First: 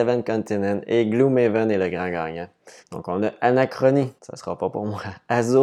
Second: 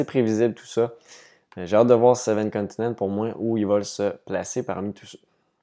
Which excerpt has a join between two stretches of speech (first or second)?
first